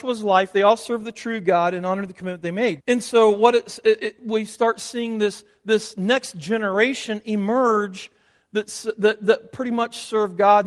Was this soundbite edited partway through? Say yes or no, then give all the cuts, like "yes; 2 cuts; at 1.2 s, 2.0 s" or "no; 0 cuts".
yes; 1 cut; at 2.8 s